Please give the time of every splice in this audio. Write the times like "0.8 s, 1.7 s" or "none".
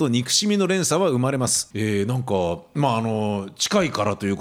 1.7 s